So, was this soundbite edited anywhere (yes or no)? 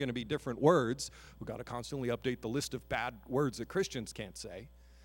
no